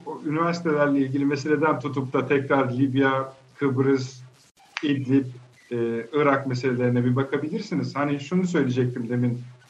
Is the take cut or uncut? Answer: uncut